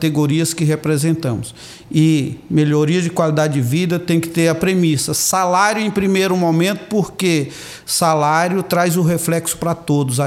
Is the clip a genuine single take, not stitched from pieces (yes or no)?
yes